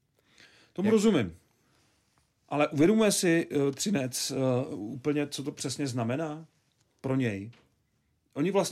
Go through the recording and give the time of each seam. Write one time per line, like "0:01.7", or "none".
none